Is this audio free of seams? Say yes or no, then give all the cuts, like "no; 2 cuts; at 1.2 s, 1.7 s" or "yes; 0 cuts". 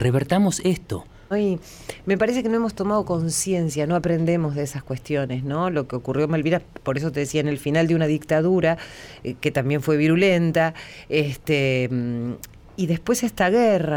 no; 1 cut; at 1.3 s